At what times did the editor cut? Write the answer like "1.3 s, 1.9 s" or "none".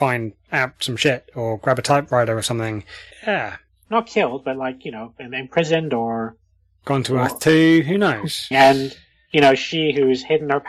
3.1 s, 8.5 s